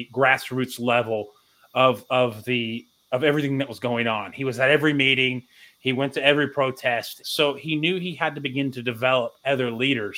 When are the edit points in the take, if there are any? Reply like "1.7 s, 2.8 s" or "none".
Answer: 7.2 s